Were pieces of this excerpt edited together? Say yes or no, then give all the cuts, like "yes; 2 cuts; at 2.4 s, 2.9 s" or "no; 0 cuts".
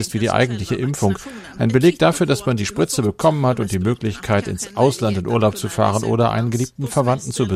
no; 0 cuts